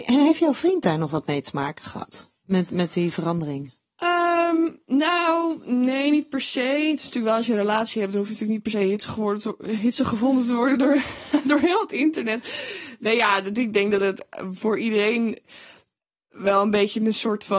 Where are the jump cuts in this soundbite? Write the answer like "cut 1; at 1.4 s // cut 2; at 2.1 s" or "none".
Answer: none

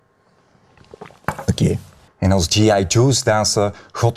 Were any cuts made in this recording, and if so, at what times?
cut 1; at 2.1 s

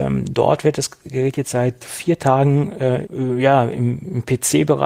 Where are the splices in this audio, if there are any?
cut 1; at 1.8 s // cut 2; at 3.0 s

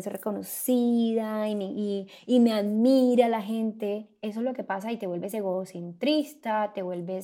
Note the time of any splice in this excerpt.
none

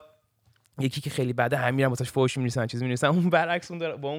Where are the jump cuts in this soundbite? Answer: none

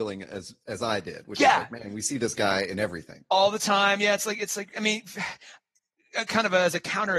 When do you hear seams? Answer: none

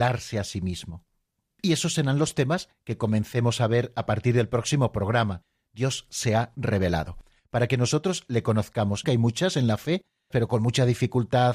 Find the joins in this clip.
cut 1; at 9.0 s // cut 2; at 10.3 s

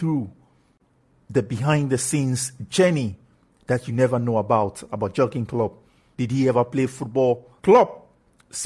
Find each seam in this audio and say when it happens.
cut 1; at 6.1 s // cut 2; at 7.6 s

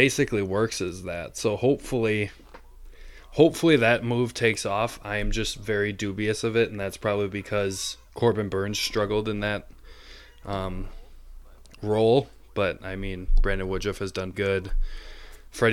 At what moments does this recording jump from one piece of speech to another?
cut 1; at 8.0 s // cut 2; at 14.3 s

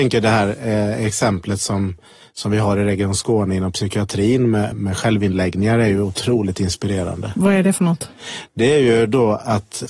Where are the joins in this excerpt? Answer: cut 1; at 4.7 s

